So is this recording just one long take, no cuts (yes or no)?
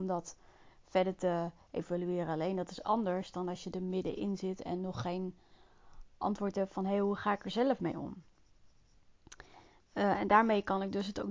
yes